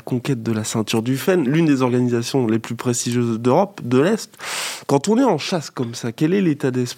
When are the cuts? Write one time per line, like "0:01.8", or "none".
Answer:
none